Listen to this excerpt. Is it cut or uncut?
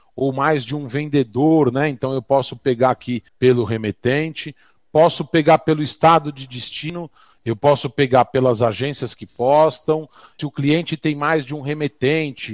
cut